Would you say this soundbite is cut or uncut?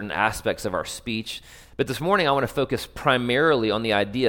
cut